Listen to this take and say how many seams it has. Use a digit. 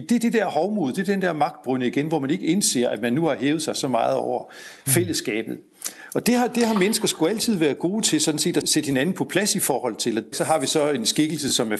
2